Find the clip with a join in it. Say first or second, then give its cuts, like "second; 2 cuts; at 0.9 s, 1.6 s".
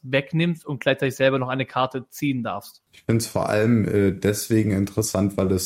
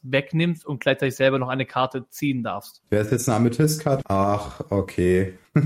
second; 2 cuts; at 2.8 s, 4.0 s